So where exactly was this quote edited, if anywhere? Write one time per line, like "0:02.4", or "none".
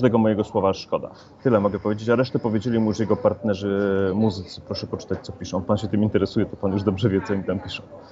0:01.4